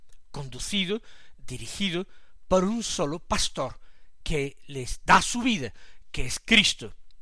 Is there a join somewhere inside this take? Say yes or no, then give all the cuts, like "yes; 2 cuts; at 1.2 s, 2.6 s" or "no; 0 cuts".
no; 0 cuts